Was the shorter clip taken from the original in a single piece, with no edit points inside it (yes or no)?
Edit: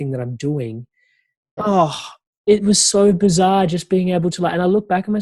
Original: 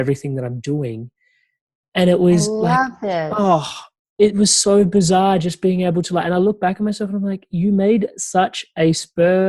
no